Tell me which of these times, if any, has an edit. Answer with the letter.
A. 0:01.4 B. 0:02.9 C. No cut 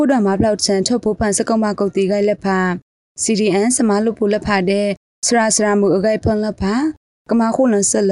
C